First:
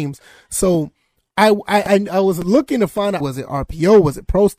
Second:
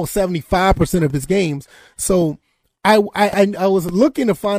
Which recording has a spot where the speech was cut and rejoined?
first; 1 cut; at 3.2 s

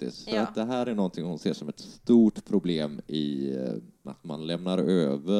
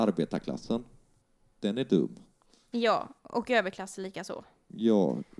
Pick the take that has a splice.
first; 1 cut; at 4.0 s

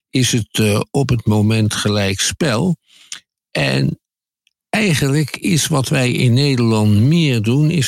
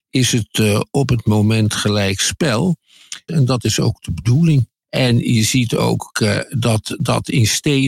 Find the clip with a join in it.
second; 2 cuts; at 3.3 s, 4.8 s

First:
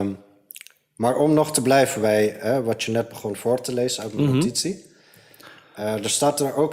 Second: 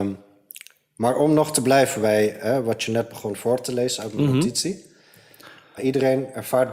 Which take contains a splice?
second; 1 cut; at 5.8 s

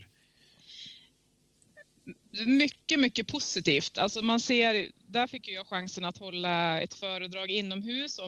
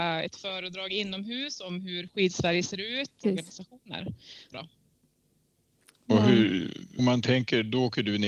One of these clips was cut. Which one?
second; 3 cuts; at 3.2 s, 4.5 s, 7.0 s

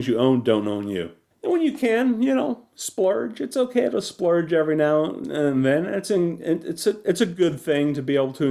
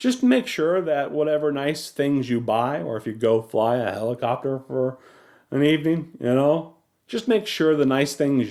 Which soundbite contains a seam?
first; 1 cut; at 1.3 s

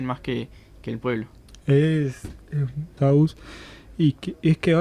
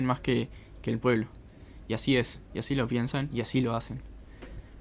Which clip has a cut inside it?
first; 2 cuts; at 1.5 s, 3.0 s

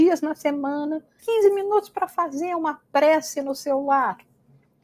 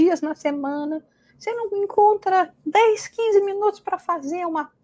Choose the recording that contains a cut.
first; 1 cut; at 1.2 s

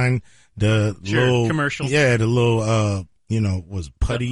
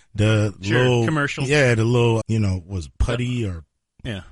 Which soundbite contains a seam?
second; 1 cut; at 2.2 s

